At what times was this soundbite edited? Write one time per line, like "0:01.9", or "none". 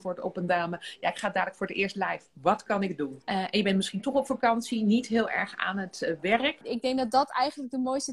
0:03.2
0:06.6